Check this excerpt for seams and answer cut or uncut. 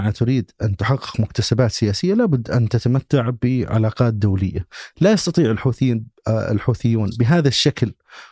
uncut